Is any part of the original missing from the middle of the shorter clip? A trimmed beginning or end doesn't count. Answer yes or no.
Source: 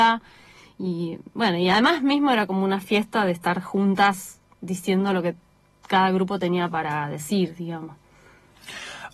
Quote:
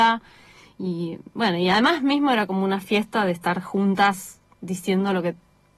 no